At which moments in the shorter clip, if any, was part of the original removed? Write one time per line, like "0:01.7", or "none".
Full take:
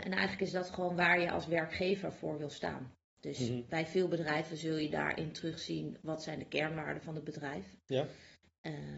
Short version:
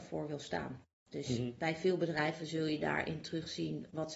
none